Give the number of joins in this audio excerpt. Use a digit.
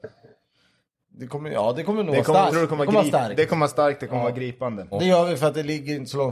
2